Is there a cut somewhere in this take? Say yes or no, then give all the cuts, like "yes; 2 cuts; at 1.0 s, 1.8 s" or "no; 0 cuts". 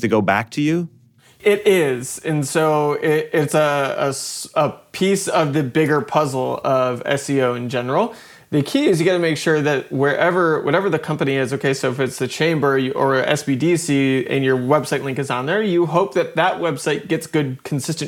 no; 0 cuts